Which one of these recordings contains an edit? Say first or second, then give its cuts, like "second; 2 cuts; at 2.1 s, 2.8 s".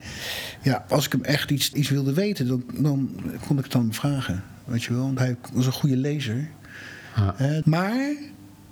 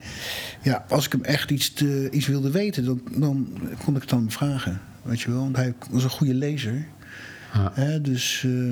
first; 2 cuts; at 1.7 s, 7.6 s